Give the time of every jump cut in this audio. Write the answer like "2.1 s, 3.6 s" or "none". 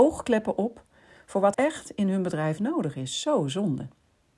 1.5 s